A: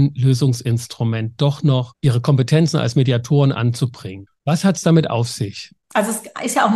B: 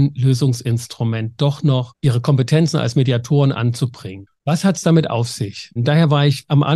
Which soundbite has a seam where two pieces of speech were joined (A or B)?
B